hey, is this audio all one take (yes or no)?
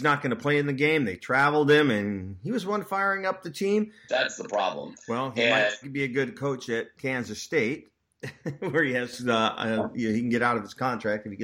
no